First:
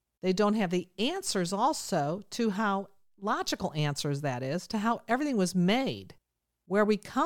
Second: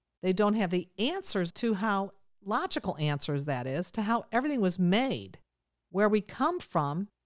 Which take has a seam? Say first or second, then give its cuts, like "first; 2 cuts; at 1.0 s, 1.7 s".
second; 1 cut; at 1.5 s